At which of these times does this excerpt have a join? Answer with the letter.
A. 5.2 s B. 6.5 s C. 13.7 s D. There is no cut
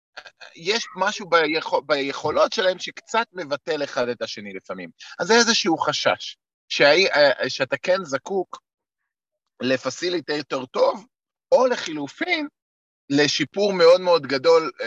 D